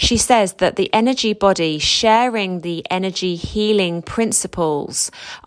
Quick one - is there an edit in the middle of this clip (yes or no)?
no